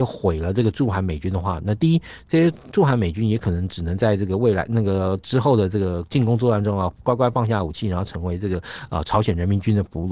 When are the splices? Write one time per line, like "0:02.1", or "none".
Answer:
0:02.7

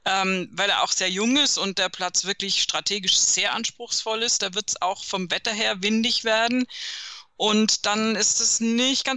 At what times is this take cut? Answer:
none

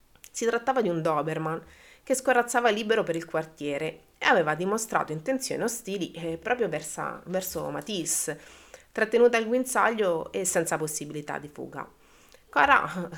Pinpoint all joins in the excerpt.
none

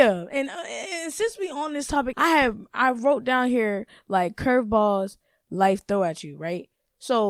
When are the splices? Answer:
0:02.1

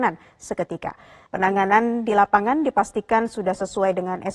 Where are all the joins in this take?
0:01.3

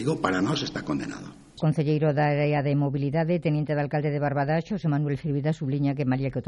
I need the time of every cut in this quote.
0:01.6

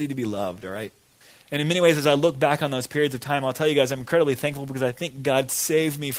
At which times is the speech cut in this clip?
none

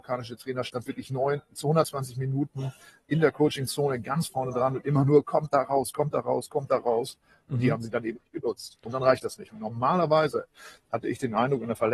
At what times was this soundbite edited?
0:07.5

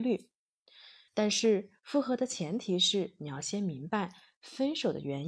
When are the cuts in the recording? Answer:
0:01.1

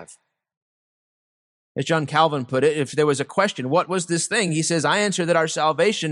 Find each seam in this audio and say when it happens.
none

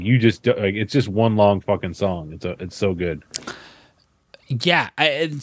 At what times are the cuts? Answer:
none

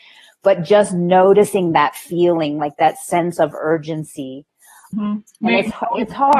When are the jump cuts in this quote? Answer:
0:04.9

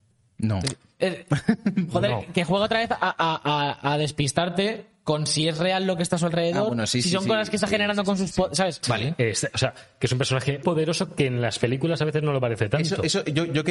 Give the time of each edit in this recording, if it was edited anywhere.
0:08.8
0:10.6

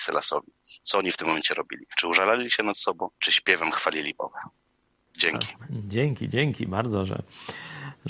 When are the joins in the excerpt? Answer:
0:03.2

